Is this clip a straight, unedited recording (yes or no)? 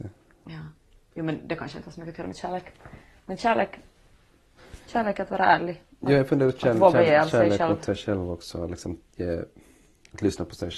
no